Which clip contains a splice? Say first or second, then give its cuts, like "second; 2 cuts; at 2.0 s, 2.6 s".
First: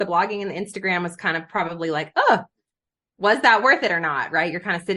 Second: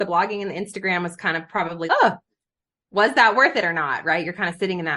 second; 1 cut; at 1.9 s